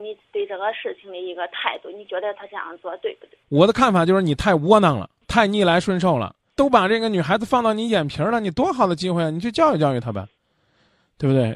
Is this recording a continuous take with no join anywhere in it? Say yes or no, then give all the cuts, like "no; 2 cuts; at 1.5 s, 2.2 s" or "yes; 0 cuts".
yes; 0 cuts